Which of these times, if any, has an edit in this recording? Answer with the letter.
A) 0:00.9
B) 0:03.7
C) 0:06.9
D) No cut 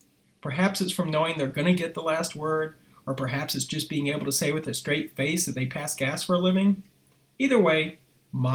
D